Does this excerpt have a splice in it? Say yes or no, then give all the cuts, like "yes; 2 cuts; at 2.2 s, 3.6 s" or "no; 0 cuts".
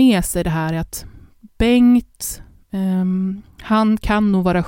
no; 0 cuts